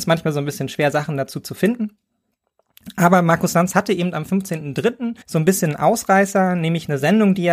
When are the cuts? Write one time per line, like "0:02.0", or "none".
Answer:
0:05.2

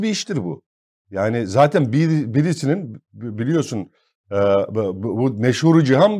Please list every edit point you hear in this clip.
none

